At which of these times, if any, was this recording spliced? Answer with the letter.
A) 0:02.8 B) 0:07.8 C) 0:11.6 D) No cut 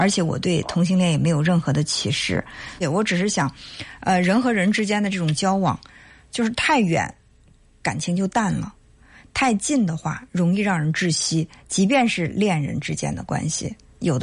A